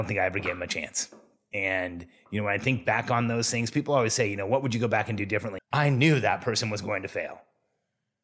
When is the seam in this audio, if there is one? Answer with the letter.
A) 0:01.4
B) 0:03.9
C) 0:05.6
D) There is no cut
C